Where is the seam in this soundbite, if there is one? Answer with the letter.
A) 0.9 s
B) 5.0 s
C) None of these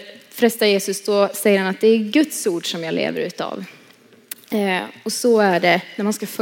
C